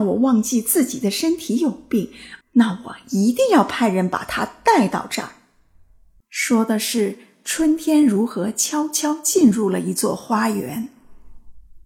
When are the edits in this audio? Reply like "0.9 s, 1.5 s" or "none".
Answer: 2.4 s, 6.2 s